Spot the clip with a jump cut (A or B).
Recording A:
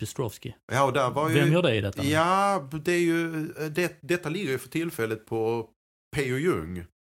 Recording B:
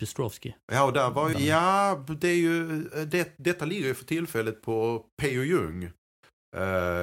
B